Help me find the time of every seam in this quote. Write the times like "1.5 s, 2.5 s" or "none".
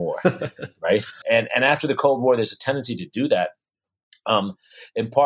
1.2 s